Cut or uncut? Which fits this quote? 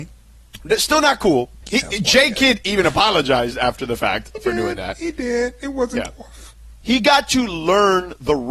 cut